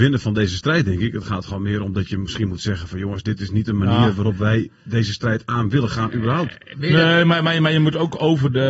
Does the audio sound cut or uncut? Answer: uncut